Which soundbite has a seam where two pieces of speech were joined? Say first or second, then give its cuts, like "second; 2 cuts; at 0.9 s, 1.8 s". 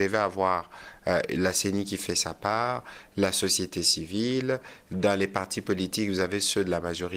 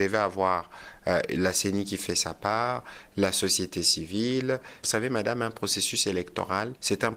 second; 1 cut; at 4.8 s